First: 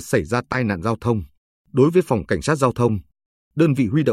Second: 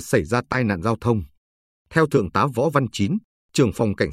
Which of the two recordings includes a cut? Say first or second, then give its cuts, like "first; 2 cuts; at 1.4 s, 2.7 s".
first; 1 cut; at 1.6 s